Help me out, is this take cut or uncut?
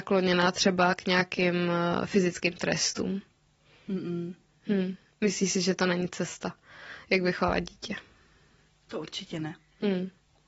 uncut